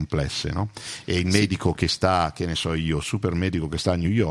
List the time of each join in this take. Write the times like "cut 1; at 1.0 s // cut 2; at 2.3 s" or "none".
cut 1; at 3.0 s